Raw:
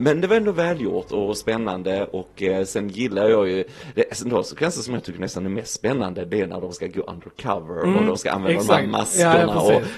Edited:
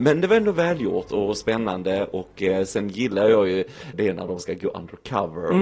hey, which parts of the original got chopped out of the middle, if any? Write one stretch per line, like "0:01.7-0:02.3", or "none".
0:03.9-0:06.3